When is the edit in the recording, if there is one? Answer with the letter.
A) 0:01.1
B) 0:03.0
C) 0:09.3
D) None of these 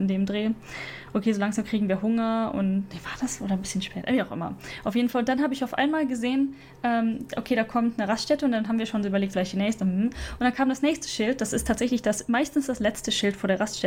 C